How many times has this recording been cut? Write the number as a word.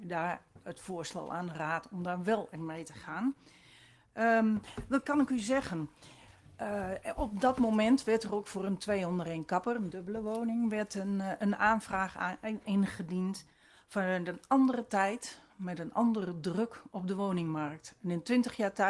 one